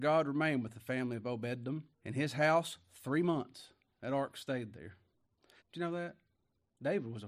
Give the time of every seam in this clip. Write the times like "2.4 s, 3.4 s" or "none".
1.9 s, 5.6 s